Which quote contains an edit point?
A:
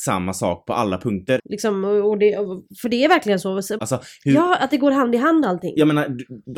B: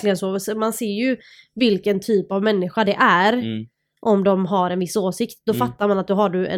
A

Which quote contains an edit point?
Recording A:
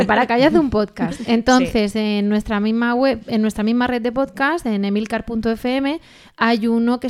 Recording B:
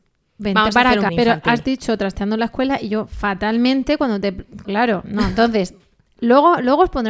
B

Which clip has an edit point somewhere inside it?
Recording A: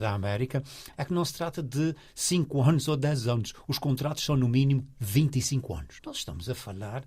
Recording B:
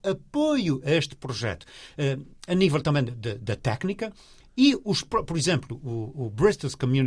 A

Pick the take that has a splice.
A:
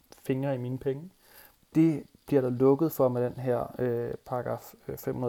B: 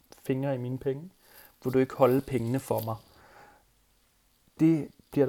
A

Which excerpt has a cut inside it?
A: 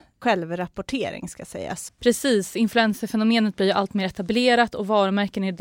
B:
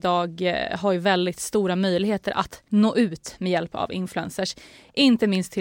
A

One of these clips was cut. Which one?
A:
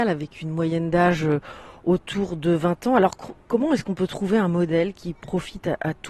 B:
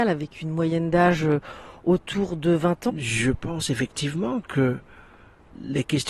B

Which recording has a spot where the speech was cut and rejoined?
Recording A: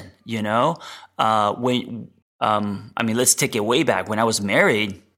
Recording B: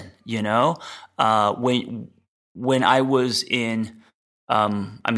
A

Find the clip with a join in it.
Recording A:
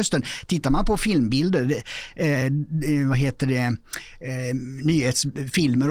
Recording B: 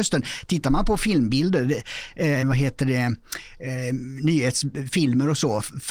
B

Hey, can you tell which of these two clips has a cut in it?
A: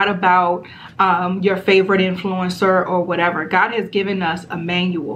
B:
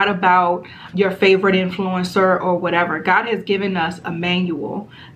B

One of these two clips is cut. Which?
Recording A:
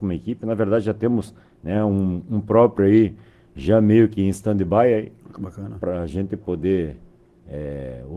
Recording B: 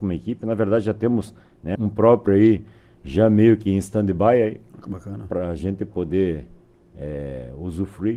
B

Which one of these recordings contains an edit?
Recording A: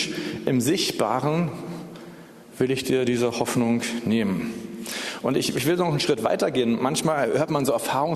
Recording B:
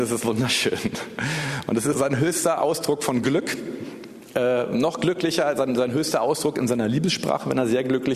B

